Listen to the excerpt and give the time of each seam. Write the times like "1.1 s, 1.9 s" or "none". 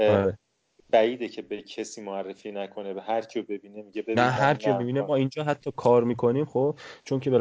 none